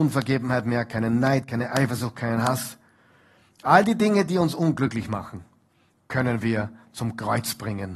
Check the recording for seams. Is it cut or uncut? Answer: uncut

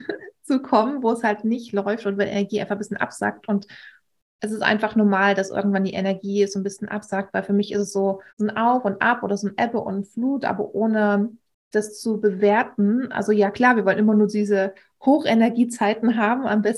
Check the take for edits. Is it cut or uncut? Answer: cut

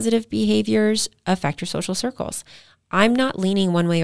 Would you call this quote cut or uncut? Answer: uncut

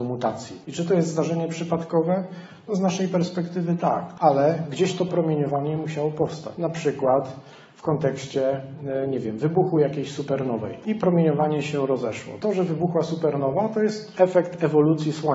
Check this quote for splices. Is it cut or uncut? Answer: uncut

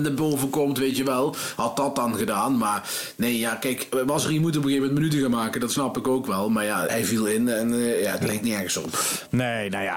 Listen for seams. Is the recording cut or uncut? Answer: cut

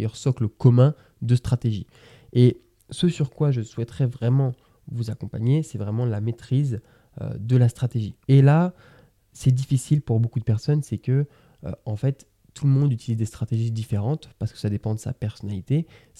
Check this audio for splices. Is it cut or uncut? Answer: cut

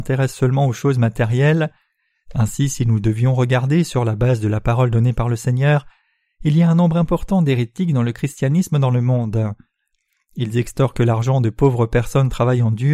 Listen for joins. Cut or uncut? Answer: uncut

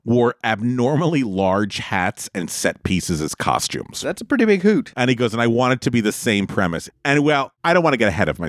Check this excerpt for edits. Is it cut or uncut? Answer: cut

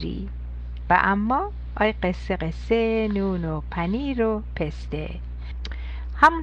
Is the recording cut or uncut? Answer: cut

